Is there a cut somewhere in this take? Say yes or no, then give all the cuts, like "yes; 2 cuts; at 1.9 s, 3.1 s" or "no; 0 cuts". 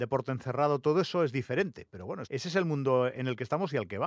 yes; 1 cut; at 2.2 s